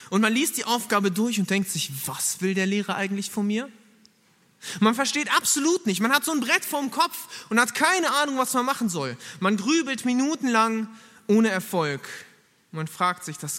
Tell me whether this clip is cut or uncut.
uncut